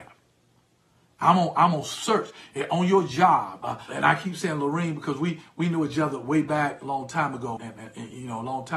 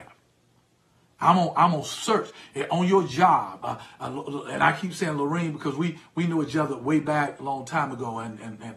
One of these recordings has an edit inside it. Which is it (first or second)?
first